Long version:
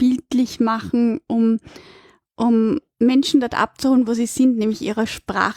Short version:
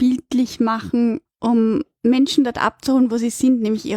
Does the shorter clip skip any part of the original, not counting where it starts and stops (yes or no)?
yes